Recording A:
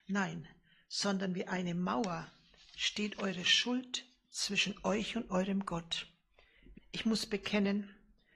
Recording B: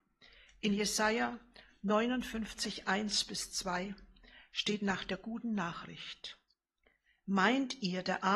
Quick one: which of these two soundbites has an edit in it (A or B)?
A